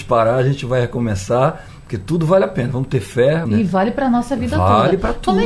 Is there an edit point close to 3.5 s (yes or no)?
yes